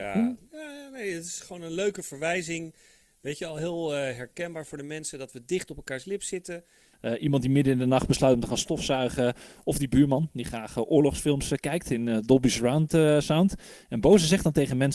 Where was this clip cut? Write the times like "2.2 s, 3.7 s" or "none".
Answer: 6.9 s